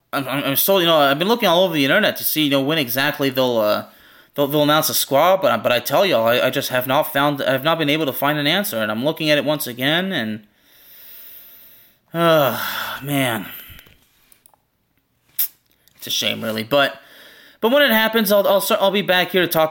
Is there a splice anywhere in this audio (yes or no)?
no